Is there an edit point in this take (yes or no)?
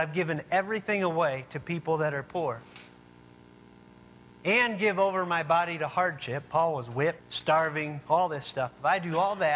yes